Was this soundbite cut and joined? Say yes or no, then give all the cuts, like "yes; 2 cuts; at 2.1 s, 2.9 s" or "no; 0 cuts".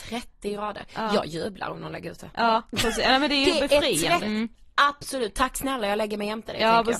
yes; 1 cut; at 4.2 s